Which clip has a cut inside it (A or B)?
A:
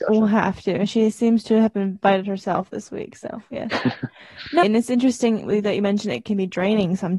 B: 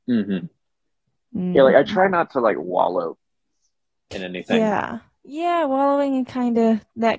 A